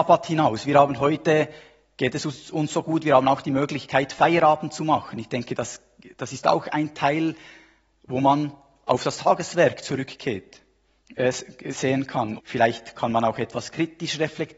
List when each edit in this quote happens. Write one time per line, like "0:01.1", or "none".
0:12.4